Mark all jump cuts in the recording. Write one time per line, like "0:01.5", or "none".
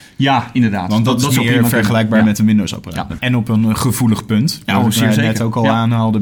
0:03.2